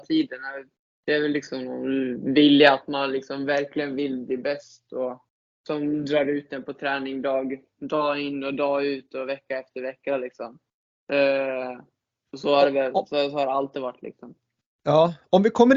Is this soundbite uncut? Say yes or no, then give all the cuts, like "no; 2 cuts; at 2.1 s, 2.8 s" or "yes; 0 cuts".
yes; 0 cuts